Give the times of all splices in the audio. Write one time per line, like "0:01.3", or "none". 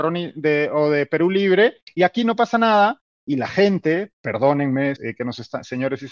0:05.0